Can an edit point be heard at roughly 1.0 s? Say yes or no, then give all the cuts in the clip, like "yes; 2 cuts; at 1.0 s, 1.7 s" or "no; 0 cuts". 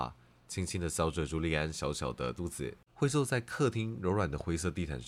no; 1 cut; at 2.9 s